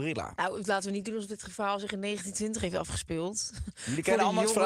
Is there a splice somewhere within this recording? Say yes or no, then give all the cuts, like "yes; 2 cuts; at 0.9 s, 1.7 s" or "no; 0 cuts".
no; 0 cuts